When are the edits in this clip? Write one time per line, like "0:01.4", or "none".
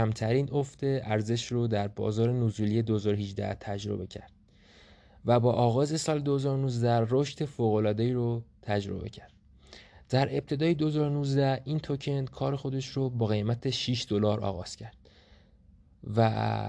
none

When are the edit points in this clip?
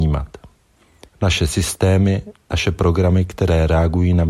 0:01.1

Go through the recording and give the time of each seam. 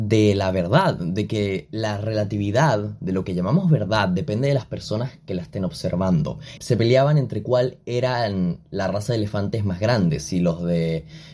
0:06.6

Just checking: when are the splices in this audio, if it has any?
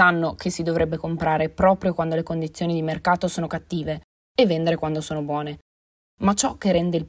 none

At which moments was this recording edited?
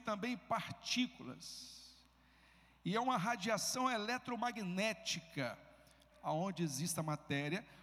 0:06.1

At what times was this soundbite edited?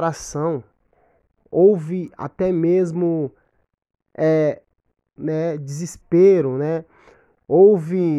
0:05.2

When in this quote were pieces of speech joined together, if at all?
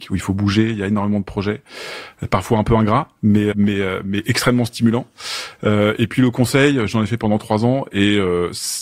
0:03.5

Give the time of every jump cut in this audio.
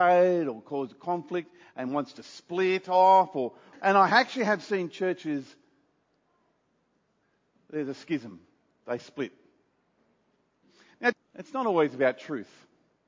0:03.7
0:11.1

